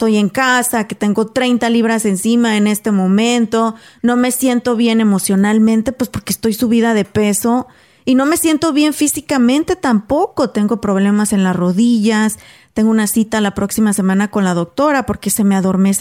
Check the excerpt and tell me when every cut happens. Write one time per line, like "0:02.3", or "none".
none